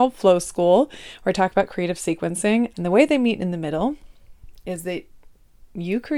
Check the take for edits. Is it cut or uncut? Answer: cut